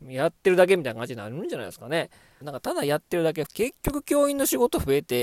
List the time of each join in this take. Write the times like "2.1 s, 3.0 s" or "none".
2.4 s, 3.5 s